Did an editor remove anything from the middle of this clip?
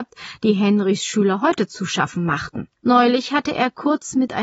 yes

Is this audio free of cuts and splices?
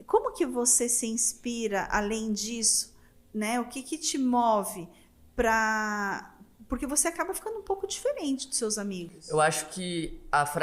yes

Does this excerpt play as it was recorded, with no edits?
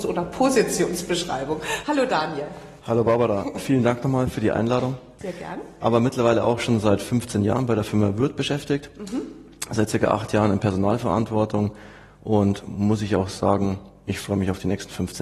no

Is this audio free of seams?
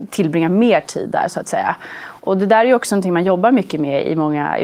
yes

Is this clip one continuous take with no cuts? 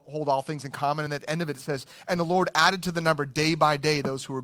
yes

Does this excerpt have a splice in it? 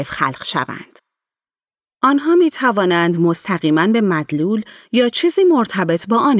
yes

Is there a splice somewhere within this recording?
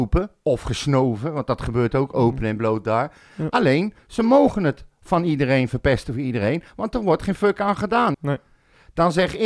yes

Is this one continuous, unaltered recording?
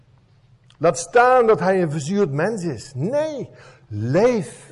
yes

